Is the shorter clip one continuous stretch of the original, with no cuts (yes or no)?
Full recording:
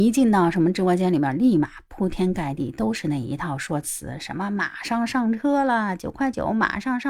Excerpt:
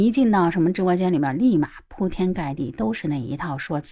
yes